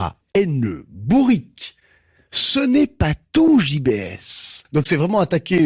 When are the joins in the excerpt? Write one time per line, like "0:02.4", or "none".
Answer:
0:04.6

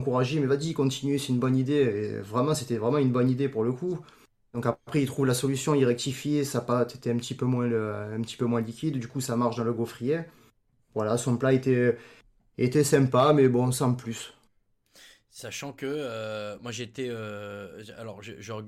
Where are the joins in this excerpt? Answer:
none

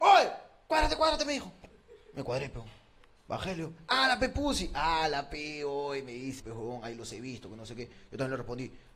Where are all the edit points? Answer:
0:06.4

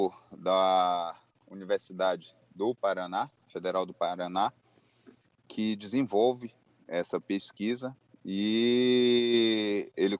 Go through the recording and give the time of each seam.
none

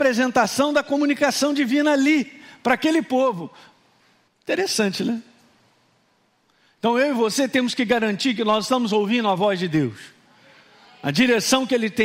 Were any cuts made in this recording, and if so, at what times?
0:04.3

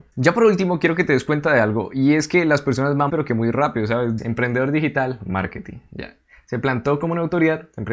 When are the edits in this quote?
0:03.1
0:04.2

